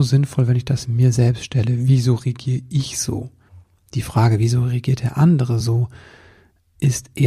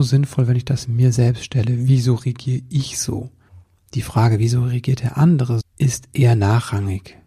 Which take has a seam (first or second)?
second